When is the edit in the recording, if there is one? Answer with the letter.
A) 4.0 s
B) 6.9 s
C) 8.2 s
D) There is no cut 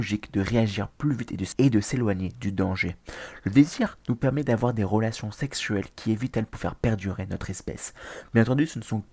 A